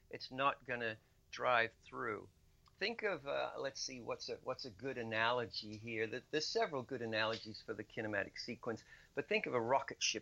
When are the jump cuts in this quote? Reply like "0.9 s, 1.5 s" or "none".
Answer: none